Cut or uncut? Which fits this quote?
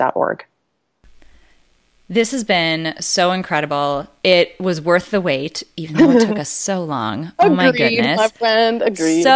uncut